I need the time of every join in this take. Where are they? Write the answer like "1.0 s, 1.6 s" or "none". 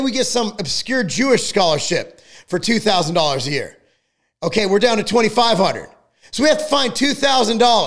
none